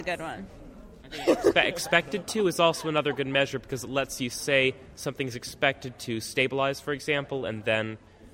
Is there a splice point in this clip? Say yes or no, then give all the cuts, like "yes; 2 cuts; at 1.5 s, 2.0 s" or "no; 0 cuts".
no; 0 cuts